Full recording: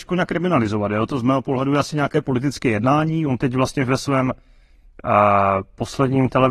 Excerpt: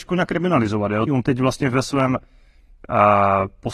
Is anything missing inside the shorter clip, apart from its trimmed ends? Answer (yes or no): yes